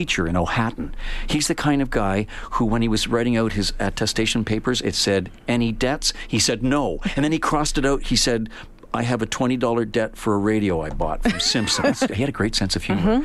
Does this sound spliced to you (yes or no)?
yes